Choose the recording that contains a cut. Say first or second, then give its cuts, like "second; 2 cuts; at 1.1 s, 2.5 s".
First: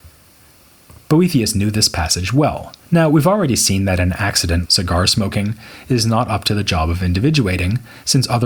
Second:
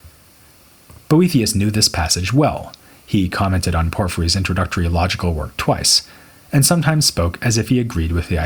first; 2 cuts; at 2.8 s, 4.6 s